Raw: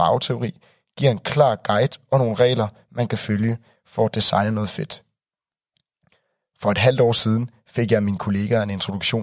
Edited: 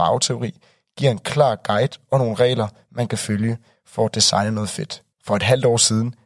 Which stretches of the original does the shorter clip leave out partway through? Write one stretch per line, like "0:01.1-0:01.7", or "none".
0:05.1-0:06.5